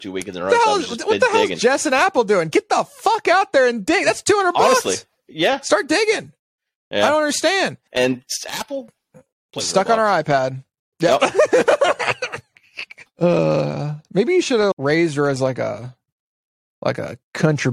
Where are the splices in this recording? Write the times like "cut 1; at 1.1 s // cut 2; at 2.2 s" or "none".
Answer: cut 1; at 7.9 s // cut 2; at 13.1 s // cut 3; at 14.7 s